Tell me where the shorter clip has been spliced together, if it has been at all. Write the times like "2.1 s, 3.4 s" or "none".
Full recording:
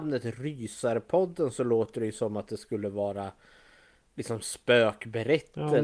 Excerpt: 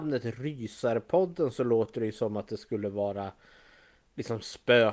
none